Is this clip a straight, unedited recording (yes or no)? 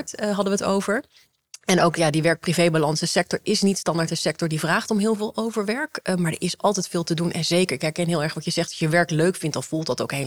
yes